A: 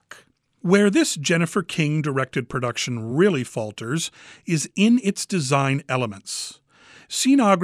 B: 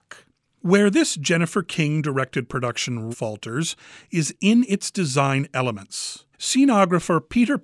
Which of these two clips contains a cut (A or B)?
B